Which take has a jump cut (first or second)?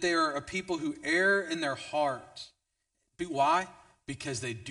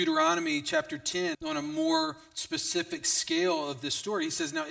second